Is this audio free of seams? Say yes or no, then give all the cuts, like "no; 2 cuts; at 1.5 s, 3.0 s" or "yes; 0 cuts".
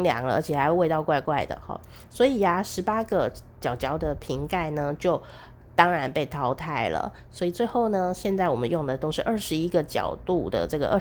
yes; 0 cuts